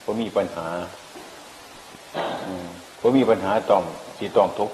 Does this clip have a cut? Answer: yes; 1 cut; at 2.9 s

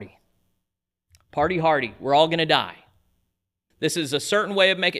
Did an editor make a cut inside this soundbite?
yes; 1 cut; at 3.7 s

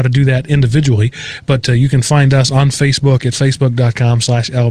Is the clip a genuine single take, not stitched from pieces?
yes; 0 cuts

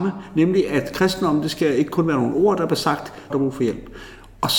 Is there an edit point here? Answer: yes; 1 cut; at 3.3 s

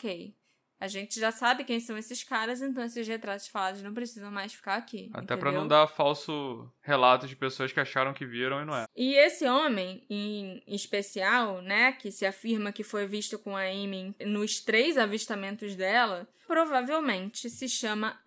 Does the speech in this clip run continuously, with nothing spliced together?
no; 2 cuts; at 8.8 s, 16.4 s

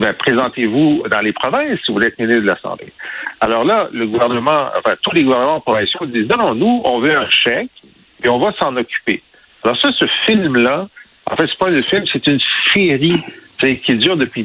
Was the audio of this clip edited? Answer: yes; 1 cut; at 1.0 s

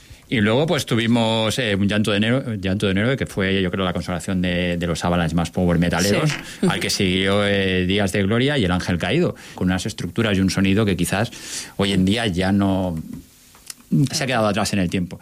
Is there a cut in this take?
yes; 2 cuts; at 9.6 s, 14.1 s

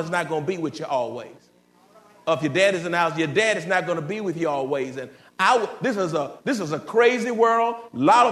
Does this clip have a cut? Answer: no; 0 cuts

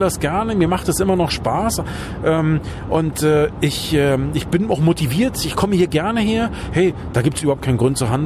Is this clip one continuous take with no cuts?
yes; 0 cuts

